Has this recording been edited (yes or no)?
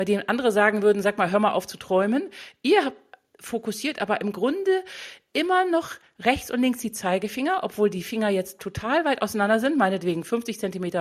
no